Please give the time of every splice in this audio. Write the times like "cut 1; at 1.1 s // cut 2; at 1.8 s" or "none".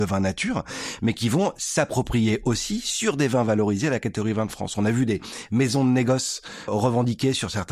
cut 1; at 6.7 s